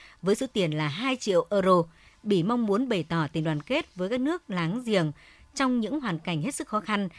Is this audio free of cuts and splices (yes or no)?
no